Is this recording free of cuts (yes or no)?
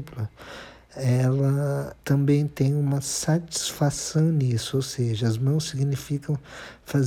no